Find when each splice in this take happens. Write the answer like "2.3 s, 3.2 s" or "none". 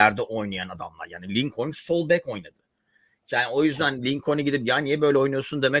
none